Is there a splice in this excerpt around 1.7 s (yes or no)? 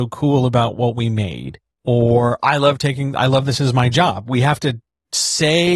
yes